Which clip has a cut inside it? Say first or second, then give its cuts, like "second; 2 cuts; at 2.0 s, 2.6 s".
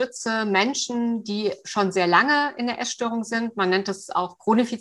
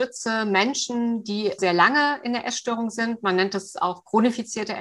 second; 1 cut; at 1.6 s